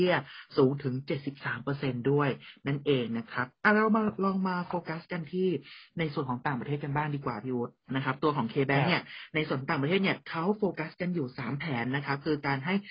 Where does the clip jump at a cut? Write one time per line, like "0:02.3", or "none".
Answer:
0:07.8